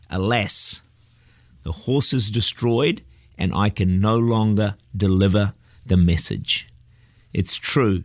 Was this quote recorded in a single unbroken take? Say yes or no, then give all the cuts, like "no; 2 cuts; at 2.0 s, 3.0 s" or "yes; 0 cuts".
yes; 0 cuts